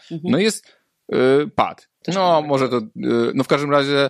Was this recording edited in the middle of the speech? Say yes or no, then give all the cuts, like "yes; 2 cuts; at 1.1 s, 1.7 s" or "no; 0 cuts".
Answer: yes; 1 cut; at 2.0 s